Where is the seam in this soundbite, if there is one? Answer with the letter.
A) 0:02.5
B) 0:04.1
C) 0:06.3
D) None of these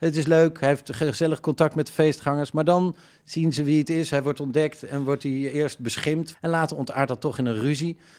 C